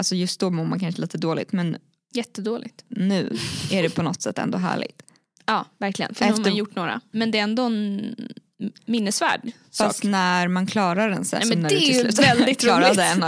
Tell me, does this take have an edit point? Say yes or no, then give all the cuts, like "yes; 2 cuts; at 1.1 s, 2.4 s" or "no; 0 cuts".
yes; 3 cuts; at 5.4 s, 7.1 s, 11.4 s